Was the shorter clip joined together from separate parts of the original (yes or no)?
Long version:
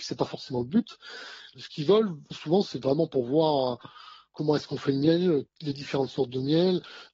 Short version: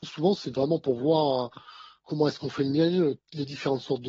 no